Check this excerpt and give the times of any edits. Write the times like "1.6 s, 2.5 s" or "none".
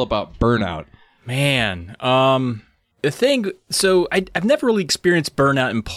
2.9 s

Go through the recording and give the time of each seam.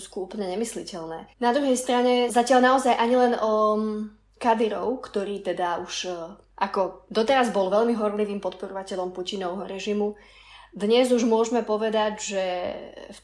1.3 s

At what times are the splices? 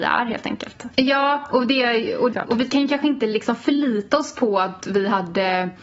0.9 s, 2.3 s

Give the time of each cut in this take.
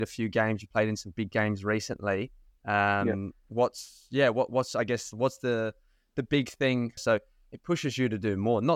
7.0 s

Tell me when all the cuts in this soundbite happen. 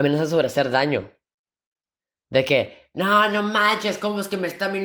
none

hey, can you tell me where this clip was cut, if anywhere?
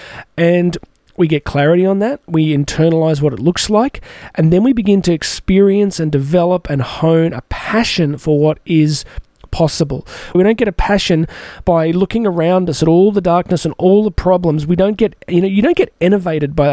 10.3 s

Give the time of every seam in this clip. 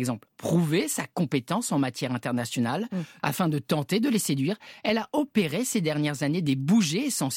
3.2 s

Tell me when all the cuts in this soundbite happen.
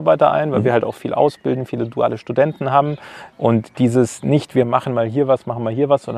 3.3 s

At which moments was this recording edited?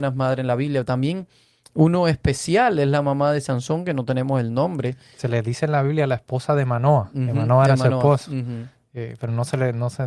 none

